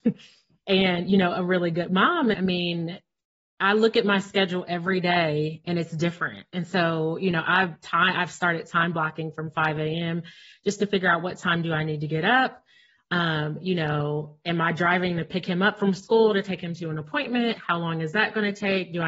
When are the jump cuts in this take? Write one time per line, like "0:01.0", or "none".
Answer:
0:02.3